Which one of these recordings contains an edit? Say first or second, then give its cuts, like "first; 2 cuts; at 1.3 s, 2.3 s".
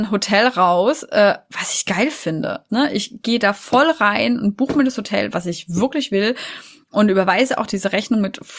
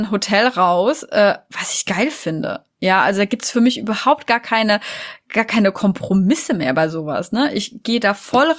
first; 1 cut; at 2.7 s